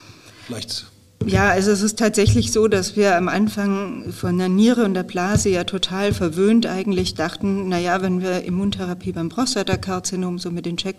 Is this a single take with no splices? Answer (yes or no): yes